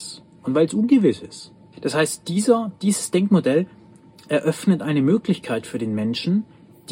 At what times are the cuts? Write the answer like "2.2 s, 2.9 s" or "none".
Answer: 1.7 s